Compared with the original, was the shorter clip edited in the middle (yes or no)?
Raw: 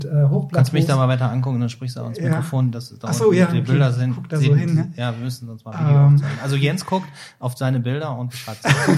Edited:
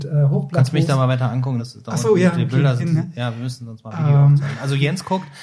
yes